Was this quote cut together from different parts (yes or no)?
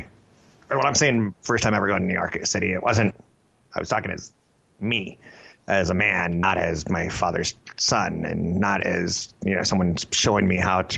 no